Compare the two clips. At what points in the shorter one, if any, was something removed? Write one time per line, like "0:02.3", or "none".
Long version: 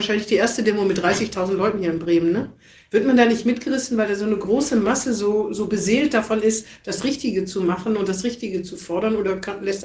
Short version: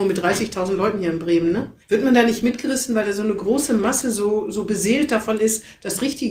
0:01.8